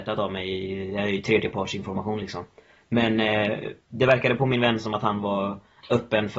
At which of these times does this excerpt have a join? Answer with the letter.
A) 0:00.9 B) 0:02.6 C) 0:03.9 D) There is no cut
D